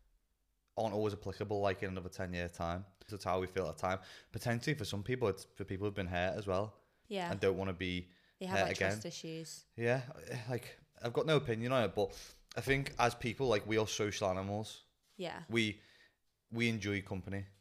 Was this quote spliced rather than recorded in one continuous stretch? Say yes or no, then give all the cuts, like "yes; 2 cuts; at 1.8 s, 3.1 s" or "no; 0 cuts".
yes; 1 cut; at 3.1 s